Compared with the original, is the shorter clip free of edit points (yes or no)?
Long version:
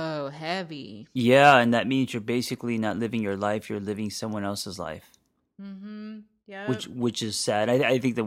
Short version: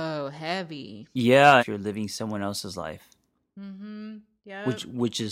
no